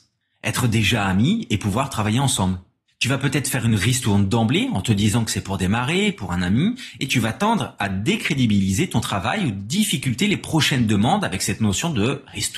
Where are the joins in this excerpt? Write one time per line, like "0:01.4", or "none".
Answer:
0:02.9

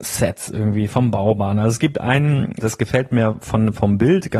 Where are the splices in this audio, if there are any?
0:02.6

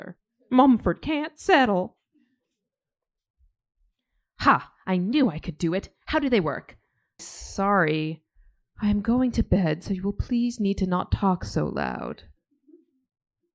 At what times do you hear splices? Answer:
0:07.2

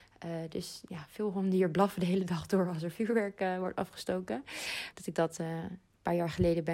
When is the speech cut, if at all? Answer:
0:04.9

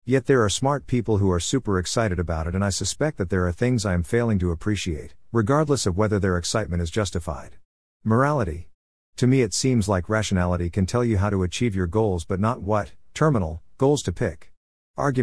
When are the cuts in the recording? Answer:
none

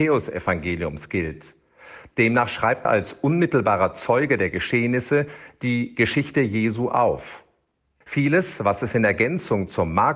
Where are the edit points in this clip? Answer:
0:02.9
0:08.0

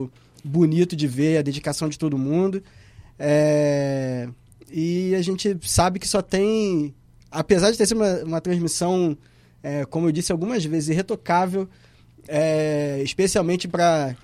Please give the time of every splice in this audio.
none

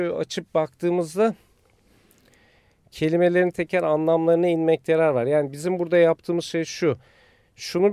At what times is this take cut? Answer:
0:03.5

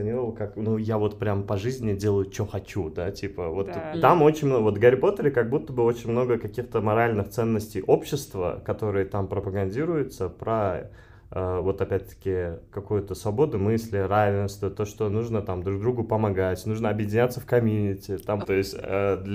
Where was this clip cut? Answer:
0:03.9
0:18.4

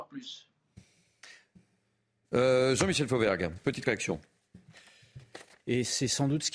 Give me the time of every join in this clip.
0:05.6

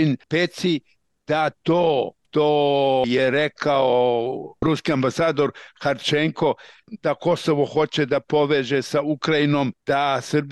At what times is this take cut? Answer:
none

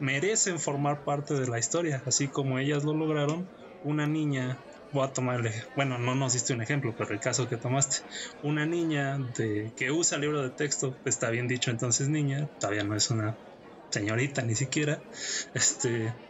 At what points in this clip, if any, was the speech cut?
none

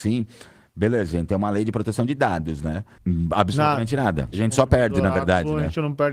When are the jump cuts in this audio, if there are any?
0:03.0
0:04.3

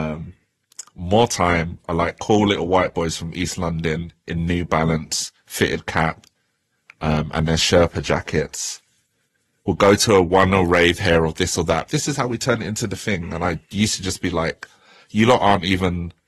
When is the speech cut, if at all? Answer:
0:11.9

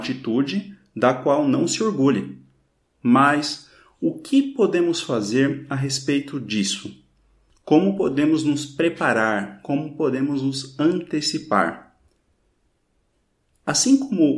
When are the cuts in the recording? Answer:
none

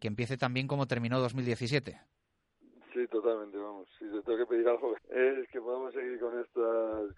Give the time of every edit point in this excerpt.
0:05.0

